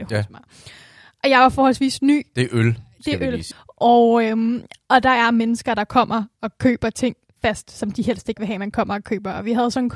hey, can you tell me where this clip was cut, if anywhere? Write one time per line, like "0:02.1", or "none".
0:03.5